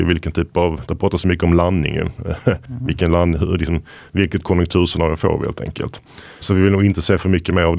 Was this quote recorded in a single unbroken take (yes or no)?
no